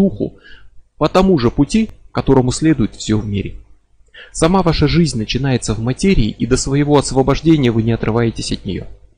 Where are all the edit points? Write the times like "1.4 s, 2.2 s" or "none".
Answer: none